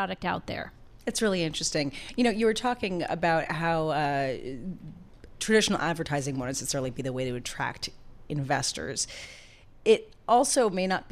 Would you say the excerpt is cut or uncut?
uncut